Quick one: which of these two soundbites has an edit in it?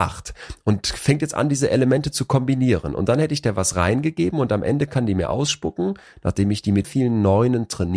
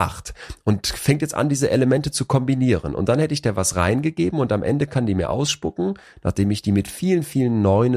first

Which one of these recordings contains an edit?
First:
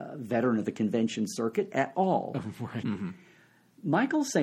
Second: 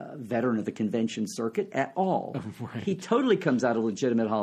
first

